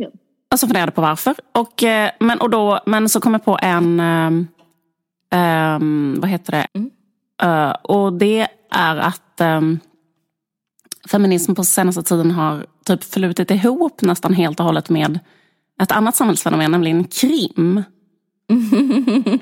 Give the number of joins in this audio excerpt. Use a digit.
2